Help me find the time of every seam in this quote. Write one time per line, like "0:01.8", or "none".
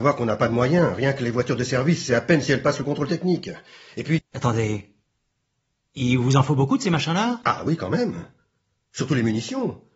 0:04.2